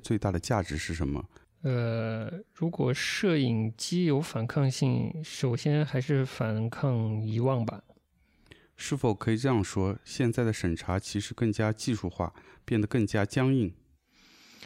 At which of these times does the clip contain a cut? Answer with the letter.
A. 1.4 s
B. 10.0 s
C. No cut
A